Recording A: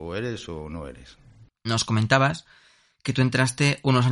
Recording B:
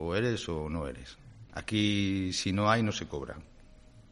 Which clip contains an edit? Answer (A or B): B